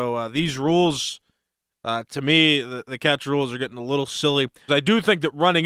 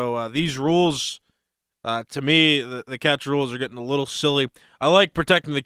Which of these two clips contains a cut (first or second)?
first